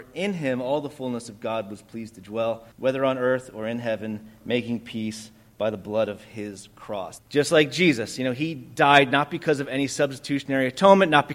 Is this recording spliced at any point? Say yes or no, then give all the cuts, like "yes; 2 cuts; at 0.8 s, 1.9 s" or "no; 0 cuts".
yes; 2 cuts; at 2.7 s, 7.2 s